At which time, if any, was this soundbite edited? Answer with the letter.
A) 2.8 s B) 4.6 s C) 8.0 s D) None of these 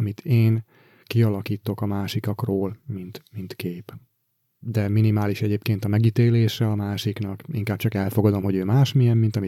B